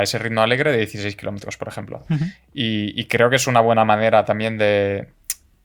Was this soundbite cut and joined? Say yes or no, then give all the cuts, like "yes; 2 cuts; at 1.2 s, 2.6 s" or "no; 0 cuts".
no; 0 cuts